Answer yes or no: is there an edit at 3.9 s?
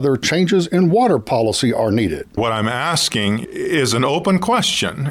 no